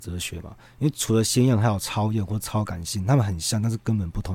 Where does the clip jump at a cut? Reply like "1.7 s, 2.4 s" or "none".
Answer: none